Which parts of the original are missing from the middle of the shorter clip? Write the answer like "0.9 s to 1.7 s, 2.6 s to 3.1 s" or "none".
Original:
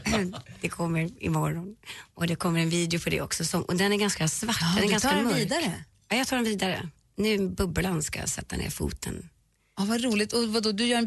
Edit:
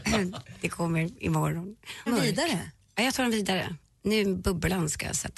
2.1 s to 5.2 s

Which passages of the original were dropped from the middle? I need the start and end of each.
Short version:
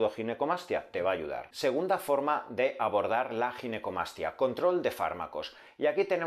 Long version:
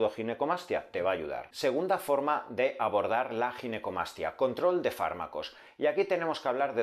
none

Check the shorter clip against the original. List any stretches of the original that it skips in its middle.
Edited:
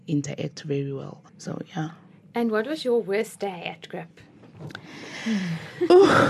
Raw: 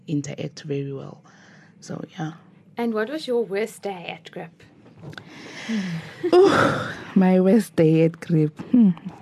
1.3 s to 1.7 s

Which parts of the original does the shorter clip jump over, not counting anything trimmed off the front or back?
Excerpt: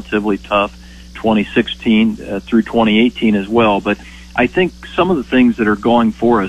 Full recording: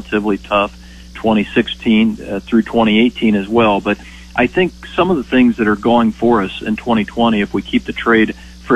none

